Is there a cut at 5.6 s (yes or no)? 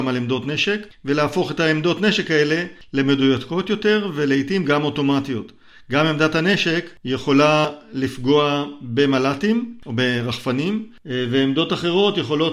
no